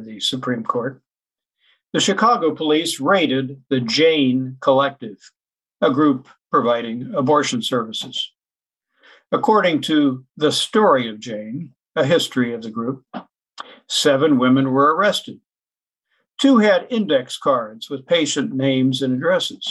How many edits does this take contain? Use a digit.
0